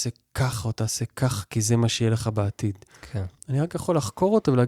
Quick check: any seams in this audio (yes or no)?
no